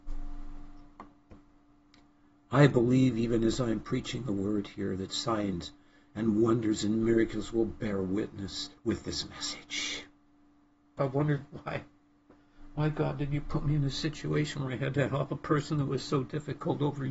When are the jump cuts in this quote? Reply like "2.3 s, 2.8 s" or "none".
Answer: 8.8 s, 11.0 s